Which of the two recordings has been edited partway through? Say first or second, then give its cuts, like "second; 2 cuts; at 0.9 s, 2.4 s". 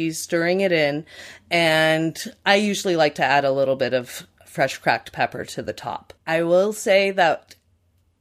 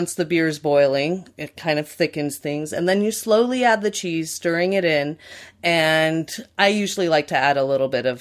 first; 1 cut; at 6.2 s